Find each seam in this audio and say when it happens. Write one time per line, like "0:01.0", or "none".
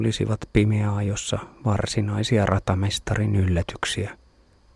none